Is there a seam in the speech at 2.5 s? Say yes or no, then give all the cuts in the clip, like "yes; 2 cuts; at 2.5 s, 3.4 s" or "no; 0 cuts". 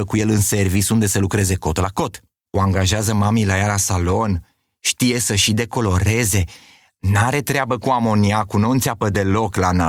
yes; 1 cut; at 2.5 s